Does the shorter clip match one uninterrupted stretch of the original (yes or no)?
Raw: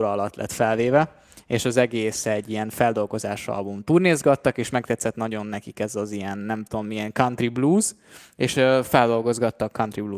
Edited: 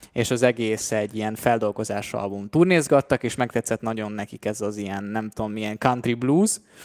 yes